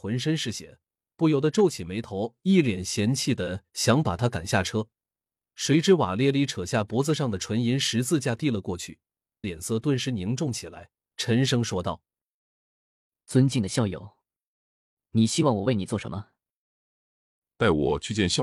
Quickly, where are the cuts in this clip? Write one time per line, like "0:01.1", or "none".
0:09.4